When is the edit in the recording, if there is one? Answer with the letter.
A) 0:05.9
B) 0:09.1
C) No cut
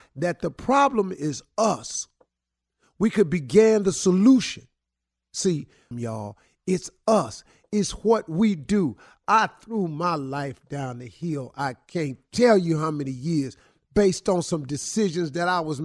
A